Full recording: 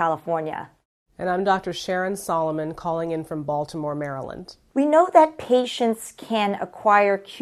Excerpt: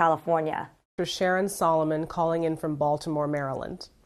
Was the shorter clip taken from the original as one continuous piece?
no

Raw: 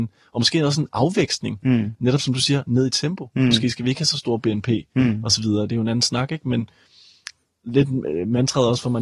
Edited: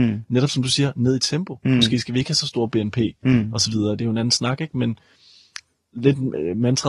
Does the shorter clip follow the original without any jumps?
yes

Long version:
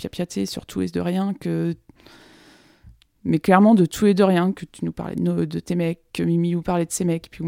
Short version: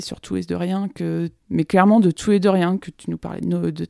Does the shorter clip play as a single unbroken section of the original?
no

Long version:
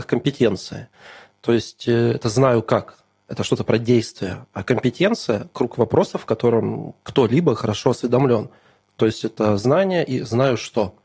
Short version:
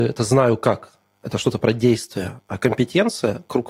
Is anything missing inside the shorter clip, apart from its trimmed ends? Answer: no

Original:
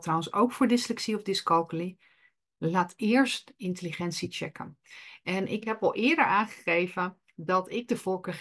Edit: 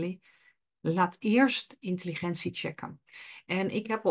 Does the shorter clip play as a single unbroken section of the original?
yes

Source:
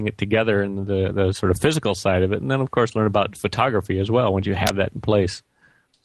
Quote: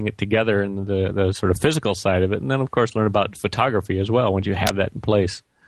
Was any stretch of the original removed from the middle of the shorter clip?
no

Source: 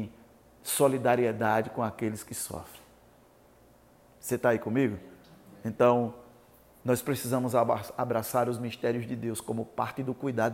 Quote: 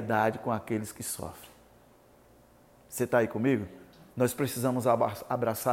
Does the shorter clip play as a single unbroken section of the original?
no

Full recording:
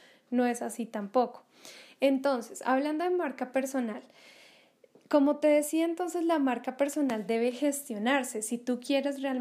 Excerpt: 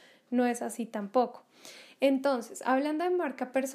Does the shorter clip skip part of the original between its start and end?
no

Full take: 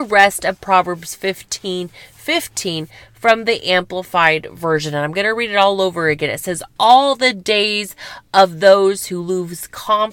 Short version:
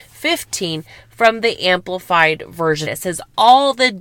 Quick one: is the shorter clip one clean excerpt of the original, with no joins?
no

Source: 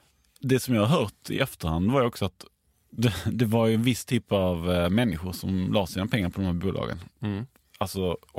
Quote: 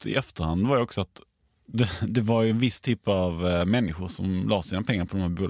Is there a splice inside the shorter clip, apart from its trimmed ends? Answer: no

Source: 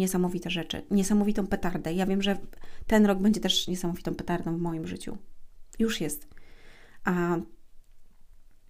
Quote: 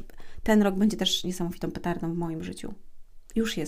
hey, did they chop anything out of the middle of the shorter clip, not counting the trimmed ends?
no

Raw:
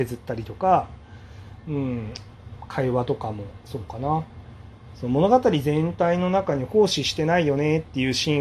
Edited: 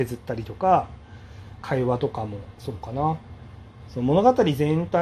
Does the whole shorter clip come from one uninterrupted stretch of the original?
no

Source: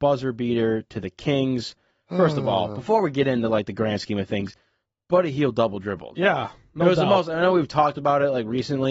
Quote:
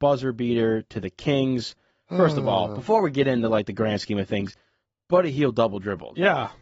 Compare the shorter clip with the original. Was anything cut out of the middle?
no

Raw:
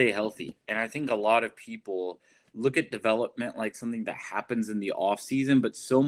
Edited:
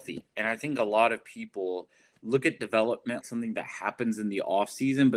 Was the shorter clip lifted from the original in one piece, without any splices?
no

